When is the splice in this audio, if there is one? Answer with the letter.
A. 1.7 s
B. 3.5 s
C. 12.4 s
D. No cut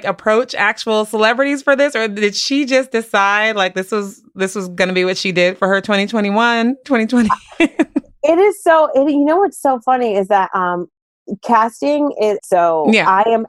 C